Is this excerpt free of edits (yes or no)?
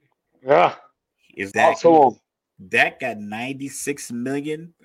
no